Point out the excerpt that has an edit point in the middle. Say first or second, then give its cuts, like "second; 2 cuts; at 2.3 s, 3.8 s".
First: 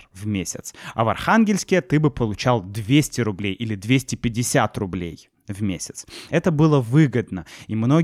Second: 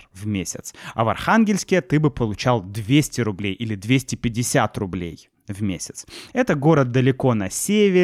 second; 1 cut; at 6.3 s